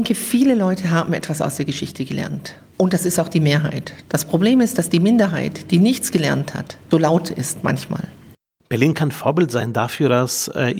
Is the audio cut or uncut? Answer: cut